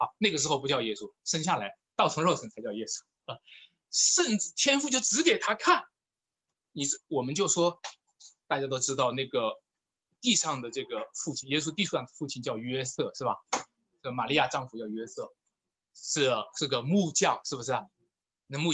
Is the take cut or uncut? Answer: uncut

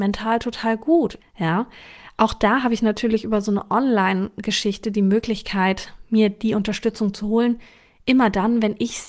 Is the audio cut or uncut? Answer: cut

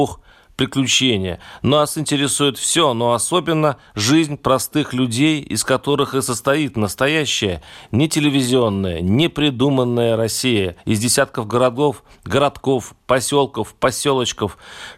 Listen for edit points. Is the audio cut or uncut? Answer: uncut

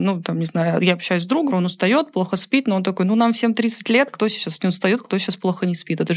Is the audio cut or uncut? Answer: cut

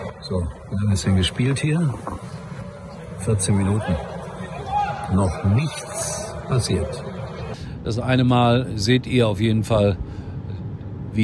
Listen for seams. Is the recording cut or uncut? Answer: uncut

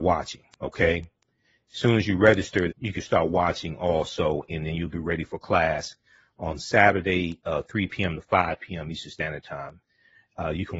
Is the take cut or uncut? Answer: cut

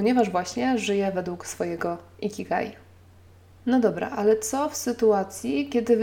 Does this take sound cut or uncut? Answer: uncut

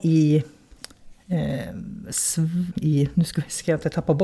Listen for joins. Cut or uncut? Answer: cut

